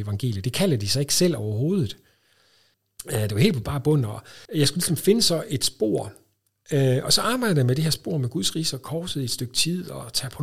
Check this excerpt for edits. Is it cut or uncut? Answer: cut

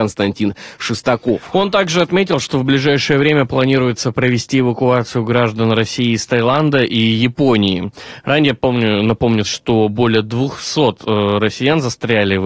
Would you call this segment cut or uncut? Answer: cut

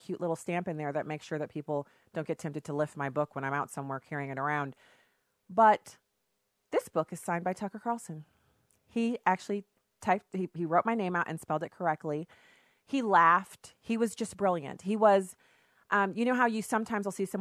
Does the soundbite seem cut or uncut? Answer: uncut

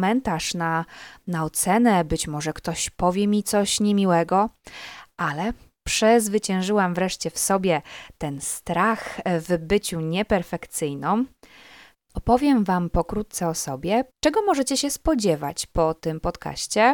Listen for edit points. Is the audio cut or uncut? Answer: cut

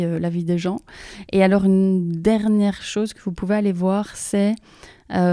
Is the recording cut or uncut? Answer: uncut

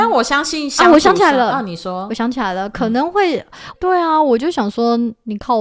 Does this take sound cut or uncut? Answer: cut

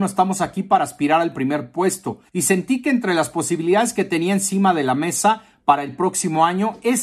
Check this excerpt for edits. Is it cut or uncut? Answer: cut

